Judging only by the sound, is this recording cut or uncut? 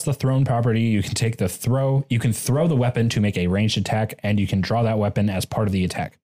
uncut